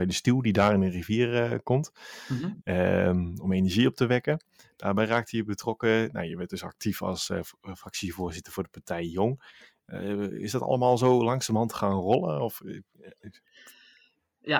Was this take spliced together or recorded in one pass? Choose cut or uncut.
uncut